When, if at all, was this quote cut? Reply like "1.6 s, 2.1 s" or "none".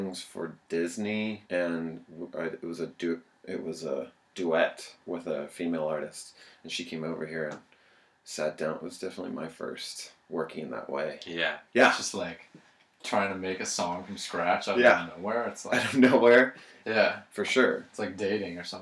1.5 s, 11.7 s, 16.8 s